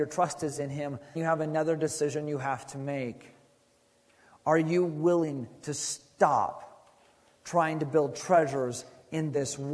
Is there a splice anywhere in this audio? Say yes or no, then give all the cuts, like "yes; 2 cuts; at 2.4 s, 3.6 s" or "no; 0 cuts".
yes; 1 cut; at 1.2 s